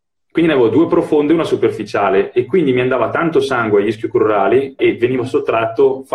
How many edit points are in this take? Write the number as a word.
one